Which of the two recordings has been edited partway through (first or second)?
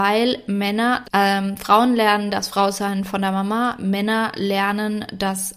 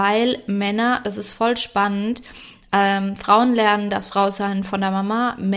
first